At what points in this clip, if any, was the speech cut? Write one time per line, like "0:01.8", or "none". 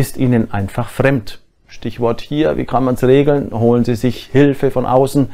none

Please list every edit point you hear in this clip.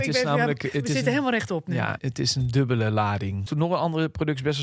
0:02.0
0:03.5

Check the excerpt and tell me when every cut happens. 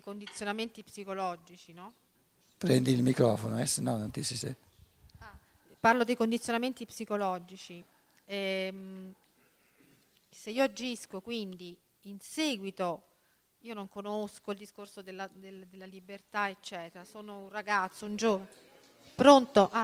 none

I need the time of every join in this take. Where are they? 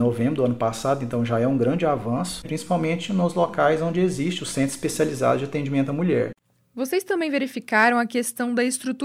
0:02.4

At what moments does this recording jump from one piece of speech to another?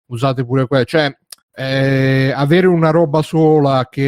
0:01.4

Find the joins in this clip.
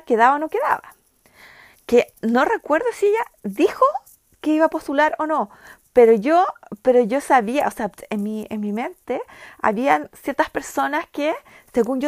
none

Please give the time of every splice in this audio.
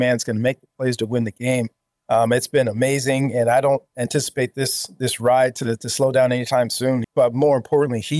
0:07.0

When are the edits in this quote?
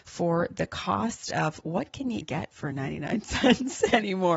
0:02.2

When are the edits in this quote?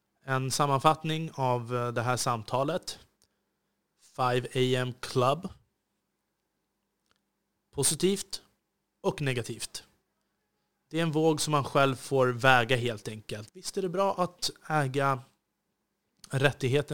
0:13.5

